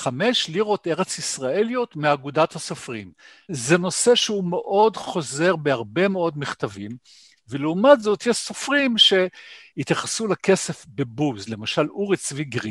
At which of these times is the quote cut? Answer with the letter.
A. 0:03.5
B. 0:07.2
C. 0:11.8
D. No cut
A